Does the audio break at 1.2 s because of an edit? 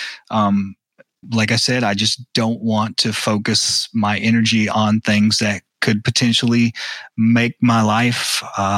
yes; 1 cut; at 1.2 s

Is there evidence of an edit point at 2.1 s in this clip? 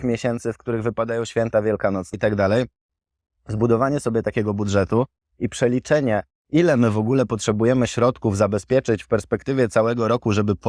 yes; 1 cut; at 2.1 s

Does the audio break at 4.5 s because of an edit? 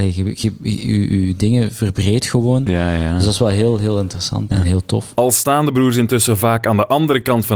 yes; 1 cut; at 4.5 s

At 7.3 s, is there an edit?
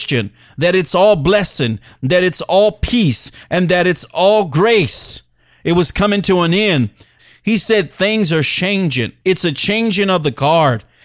no; 2 cuts; at 3.4 s, 9.2 s

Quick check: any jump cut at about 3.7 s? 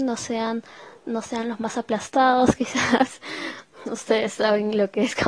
no; 1 cut; at 1.0 s

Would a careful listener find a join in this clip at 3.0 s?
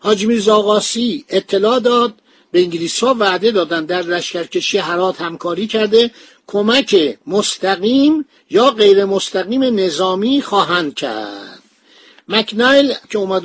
yes; 2 cuts; at 3.0 s, 7.2 s

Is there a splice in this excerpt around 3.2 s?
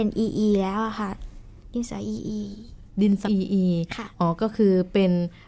yes; 1 cut; at 3.2 s

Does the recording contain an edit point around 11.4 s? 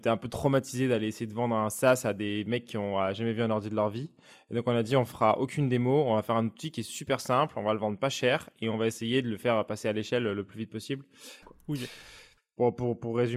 yes; 1 cut; at 11.4 s

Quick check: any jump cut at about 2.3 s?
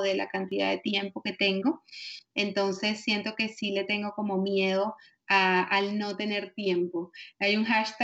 no; 0 cuts

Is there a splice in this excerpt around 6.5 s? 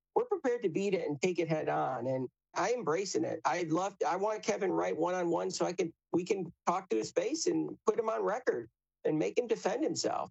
no; 1 cut; at 2.5 s

